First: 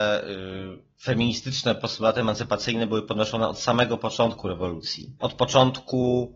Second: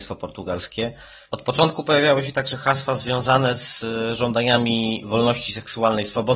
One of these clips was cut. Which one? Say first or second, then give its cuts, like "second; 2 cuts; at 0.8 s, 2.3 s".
first; 1 cut; at 5.2 s